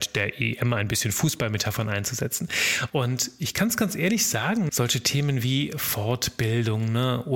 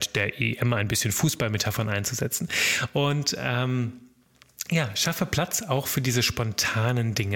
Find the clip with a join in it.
first; 2 cuts; at 2.9 s, 4.7 s

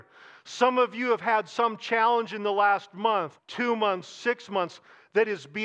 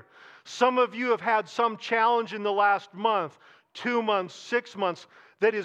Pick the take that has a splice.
first; 1 cut; at 3.4 s

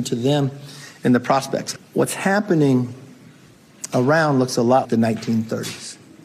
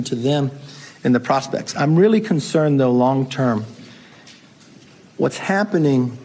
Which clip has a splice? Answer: first; 2 cuts; at 1.8 s, 4.8 s

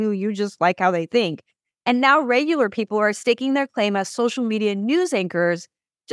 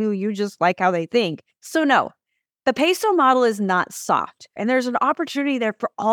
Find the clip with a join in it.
second; 2 cuts; at 1.6 s, 4.6 s

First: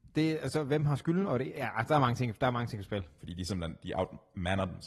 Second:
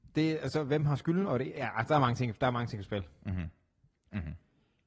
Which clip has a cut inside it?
first; 1 cut; at 3.2 s

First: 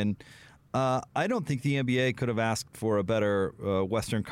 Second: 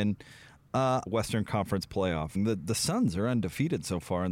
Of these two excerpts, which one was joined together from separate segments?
second; 2 cuts; at 1.1 s, 2.3 s

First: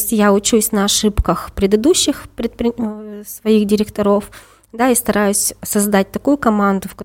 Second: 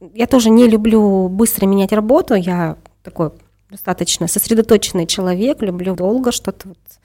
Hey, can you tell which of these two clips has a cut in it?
second; 1 cut; at 6.0 s

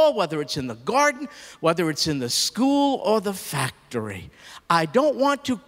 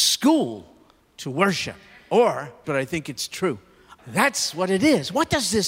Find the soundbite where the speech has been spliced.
second; 2 cuts; at 2.6 s, 4.0 s

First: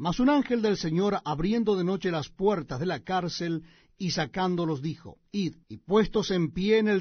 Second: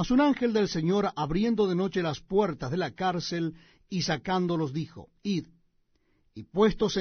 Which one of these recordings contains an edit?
first; 1 cut; at 5.6 s

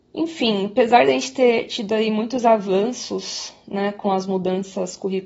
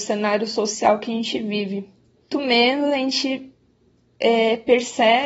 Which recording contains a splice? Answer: second; 1 cut; at 2.3 s

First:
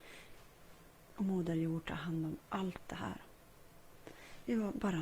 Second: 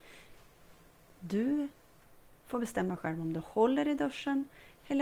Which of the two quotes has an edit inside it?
first; 1 cut; at 1.1 s

